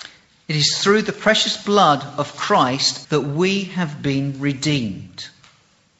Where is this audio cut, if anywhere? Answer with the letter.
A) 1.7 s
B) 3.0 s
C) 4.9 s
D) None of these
B